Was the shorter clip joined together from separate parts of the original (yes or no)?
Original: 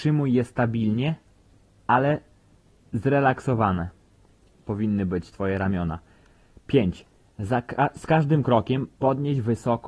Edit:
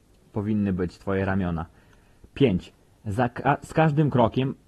no